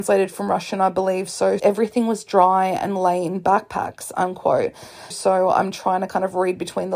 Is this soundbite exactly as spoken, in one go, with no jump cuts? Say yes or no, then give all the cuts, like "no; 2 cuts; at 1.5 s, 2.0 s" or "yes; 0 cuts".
no; 2 cuts; at 1.6 s, 5.1 s